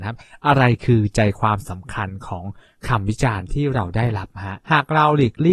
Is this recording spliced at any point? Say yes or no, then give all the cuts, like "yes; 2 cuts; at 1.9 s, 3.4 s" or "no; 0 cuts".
yes; 1 cut; at 4.6 s